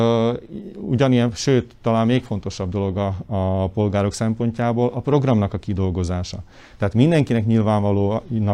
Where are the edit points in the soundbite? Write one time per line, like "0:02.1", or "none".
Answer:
none